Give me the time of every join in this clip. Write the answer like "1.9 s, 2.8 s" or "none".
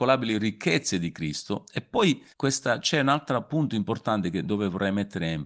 2.3 s